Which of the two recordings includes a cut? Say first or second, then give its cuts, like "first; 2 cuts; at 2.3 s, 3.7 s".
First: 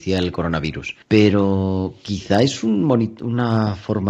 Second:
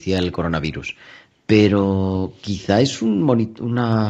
first; 1 cut; at 1.0 s